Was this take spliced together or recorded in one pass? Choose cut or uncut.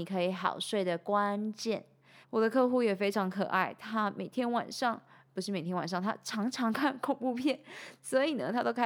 cut